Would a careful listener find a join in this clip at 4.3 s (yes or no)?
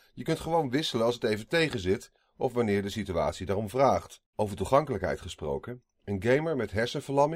yes